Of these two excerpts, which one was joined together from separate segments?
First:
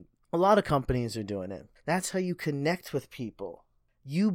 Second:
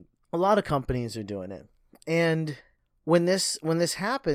first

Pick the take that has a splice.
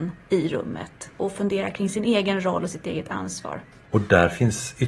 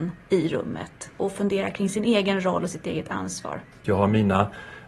second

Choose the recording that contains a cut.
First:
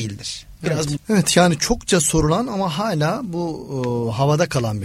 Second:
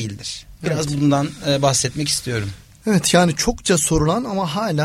first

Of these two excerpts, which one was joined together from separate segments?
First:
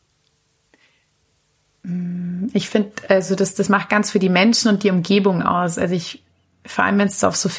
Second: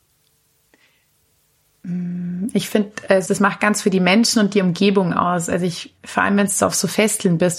second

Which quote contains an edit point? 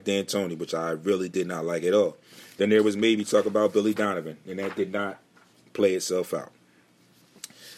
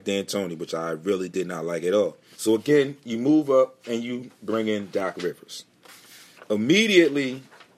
second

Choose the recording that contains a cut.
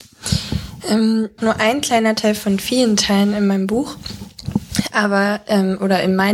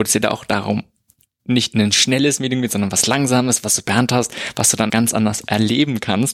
second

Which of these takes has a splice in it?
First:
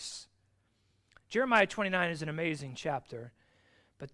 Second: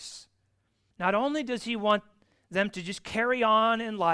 second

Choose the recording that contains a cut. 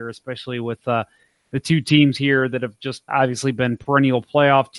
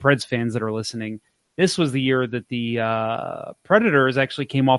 first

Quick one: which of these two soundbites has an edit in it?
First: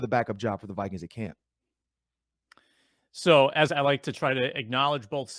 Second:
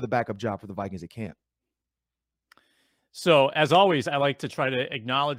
first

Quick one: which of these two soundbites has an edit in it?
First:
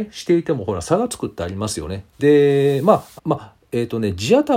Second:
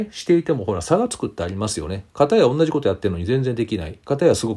first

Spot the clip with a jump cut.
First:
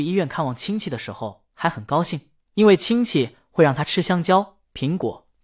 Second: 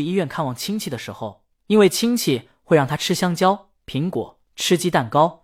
second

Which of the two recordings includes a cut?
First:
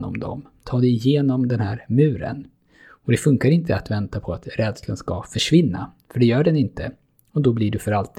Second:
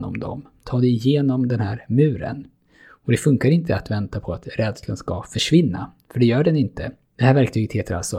second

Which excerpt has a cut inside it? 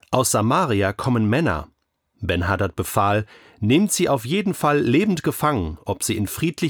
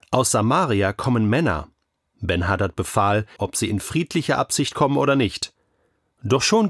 second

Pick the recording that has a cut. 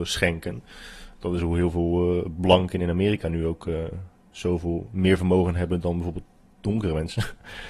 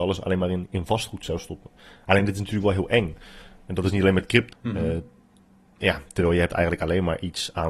second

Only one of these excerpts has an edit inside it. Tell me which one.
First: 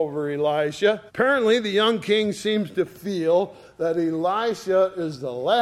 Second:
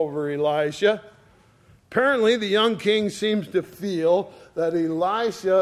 first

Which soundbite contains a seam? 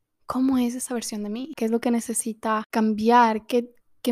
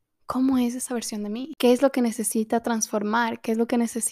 first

